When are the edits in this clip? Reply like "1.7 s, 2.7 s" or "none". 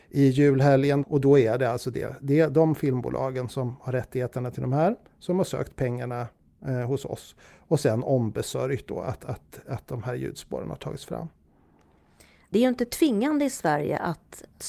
1.0 s